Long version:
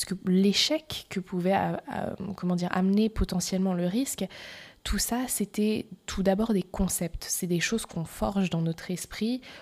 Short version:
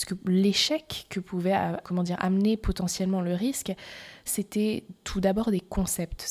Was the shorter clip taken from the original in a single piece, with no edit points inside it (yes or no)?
no